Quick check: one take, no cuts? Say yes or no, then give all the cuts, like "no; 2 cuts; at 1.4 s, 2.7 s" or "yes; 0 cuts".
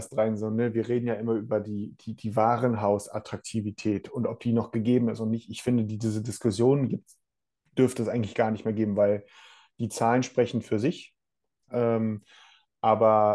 no; 1 cut; at 11.7 s